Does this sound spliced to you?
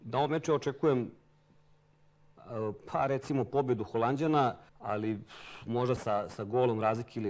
yes; 2 cuts; at 4.7 s, 6.0 s

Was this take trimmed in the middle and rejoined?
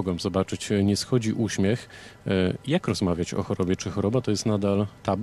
no; 0 cuts

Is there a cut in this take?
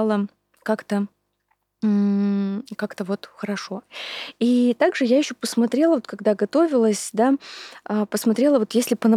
no; 0 cuts

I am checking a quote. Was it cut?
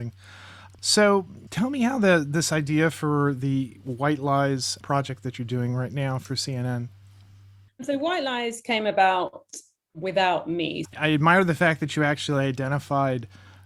yes; 1 cut; at 10.8 s

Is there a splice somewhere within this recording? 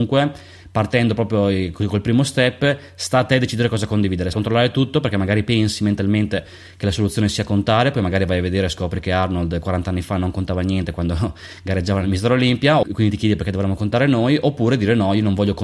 yes; 2 cuts; at 4.3 s, 12.8 s

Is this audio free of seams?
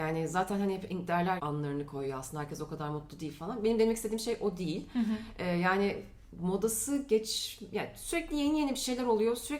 no; 1 cut; at 1.4 s

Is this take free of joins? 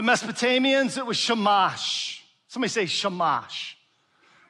yes; 0 cuts

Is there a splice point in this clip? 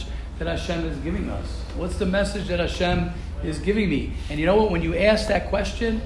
no; 0 cuts

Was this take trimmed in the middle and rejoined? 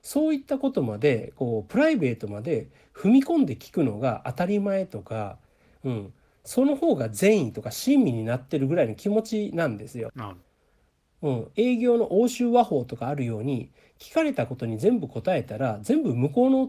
yes; 1 cut; at 10.1 s

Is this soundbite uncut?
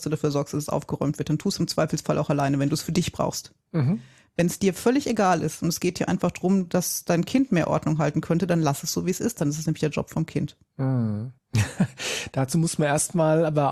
no; 1 cut; at 11.4 s

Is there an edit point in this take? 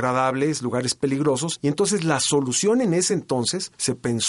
no; 0 cuts

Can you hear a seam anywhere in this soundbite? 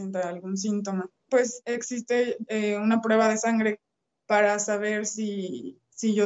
yes; 1 cut; at 1.3 s

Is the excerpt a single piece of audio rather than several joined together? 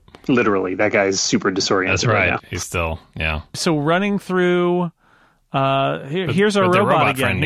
yes; 0 cuts

